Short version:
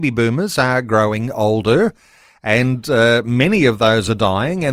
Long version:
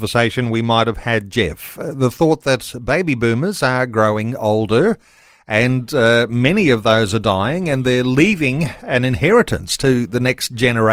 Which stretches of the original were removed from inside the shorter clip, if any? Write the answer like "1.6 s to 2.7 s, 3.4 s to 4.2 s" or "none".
none